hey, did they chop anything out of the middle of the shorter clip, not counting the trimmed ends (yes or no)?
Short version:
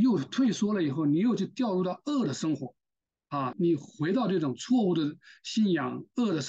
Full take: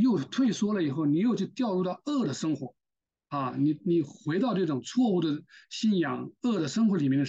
yes